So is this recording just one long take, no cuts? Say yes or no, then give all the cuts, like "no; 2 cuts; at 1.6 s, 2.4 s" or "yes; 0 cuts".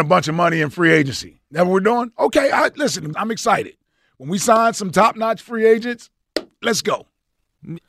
no; 2 cuts; at 3.1 s, 6.6 s